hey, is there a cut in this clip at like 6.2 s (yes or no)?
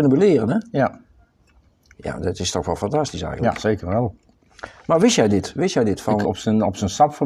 yes